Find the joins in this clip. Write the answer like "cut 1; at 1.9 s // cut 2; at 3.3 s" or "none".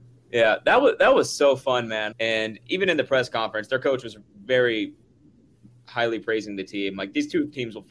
cut 1; at 2.1 s